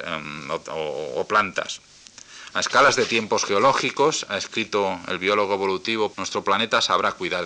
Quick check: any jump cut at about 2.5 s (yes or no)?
no